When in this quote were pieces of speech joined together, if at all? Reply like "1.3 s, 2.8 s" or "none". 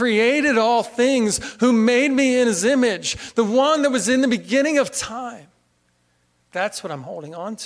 none